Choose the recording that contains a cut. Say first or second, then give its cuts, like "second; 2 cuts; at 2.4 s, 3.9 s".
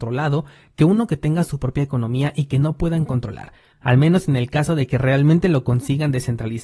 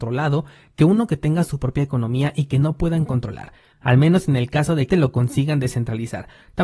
second; 1 cut; at 4.9 s